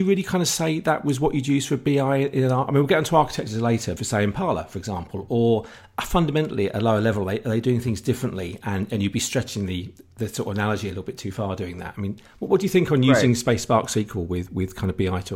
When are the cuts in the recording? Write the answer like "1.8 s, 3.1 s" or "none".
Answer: 4.0 s